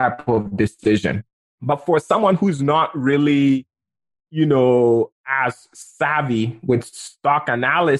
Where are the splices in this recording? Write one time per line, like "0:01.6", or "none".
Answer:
none